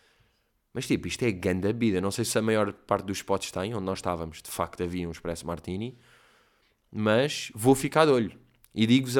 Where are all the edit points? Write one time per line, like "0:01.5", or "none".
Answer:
none